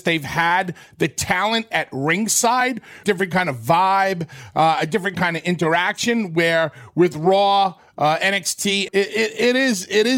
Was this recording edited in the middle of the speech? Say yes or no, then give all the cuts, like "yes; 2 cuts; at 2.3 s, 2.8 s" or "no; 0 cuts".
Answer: yes; 2 cuts; at 3.0 s, 8.9 s